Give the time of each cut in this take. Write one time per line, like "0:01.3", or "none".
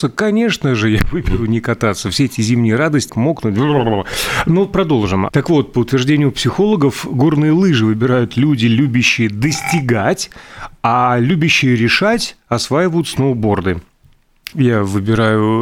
0:03.1
0:05.3
0:14.5